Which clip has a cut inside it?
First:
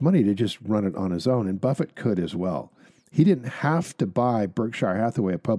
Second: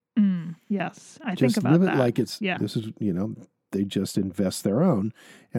second; 1 cut; at 2.6 s

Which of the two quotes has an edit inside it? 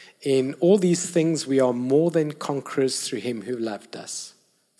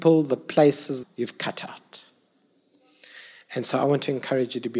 second; 1 cut; at 1.0 s

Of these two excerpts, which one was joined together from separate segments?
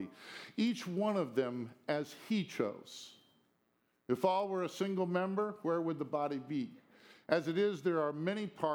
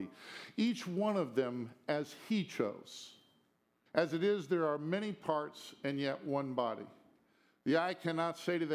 second; 1 cut; at 3.9 s

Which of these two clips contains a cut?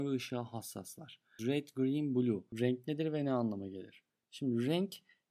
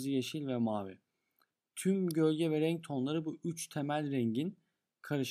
first; 2 cuts; at 1.4 s, 2.5 s

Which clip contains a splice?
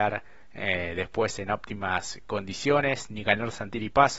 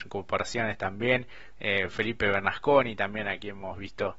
second; 1 cut; at 1.5 s

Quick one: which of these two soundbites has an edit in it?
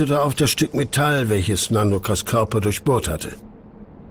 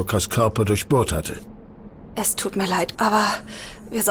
second; 1 cut; at 2.9 s

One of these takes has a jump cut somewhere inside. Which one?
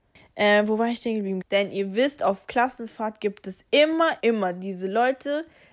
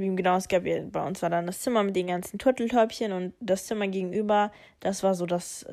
first; 2 cuts; at 1.4 s, 4.2 s

